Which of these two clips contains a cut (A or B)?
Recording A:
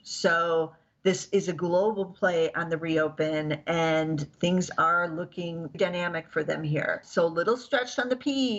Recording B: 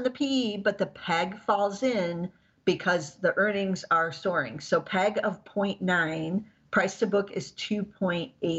A